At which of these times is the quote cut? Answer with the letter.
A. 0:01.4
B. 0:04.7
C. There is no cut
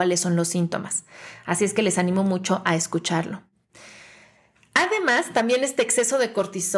C